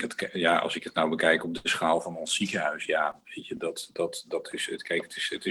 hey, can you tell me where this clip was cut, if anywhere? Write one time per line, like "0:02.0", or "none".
none

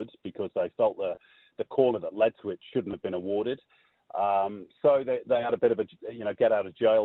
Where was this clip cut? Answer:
none

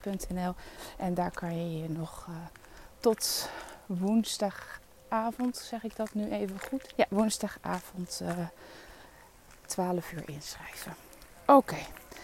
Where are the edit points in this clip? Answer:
0:06.9

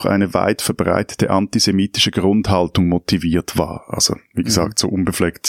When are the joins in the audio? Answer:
none

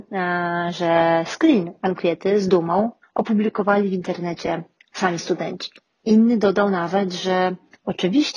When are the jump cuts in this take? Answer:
0:03.0
0:06.0

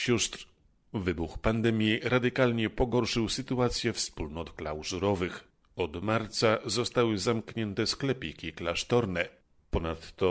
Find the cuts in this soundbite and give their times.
none

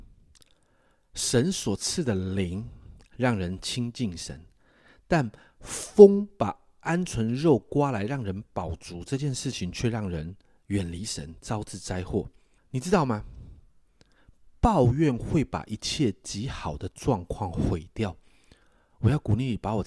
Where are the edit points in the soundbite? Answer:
0:12.6

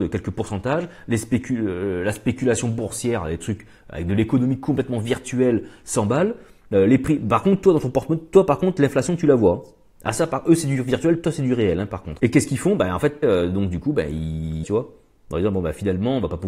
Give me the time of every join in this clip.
0:12.2
0:13.2
0:14.6

